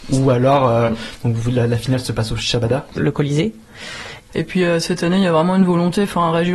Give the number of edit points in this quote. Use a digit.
2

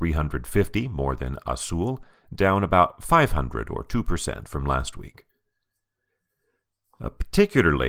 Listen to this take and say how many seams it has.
0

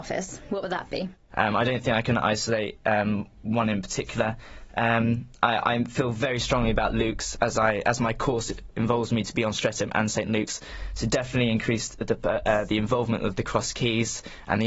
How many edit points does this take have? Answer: 1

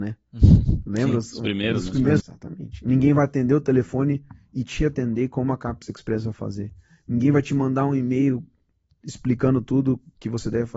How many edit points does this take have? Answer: 1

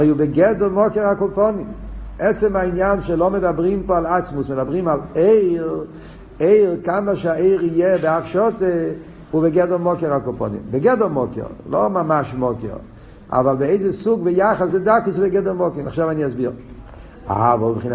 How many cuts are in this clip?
1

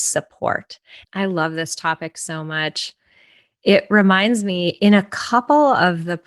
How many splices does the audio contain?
1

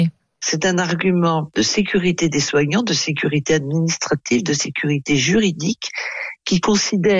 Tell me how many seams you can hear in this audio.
0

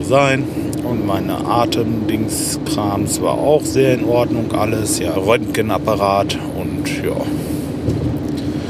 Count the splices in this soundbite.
1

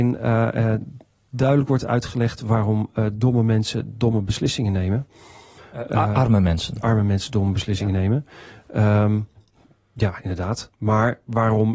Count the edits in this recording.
0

